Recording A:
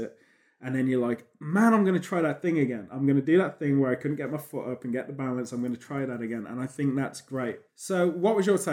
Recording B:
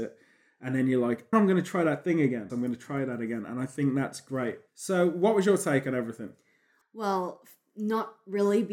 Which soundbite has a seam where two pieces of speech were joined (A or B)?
B